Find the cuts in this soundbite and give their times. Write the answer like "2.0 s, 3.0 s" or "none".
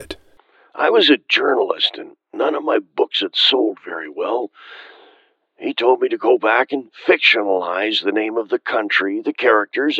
5.4 s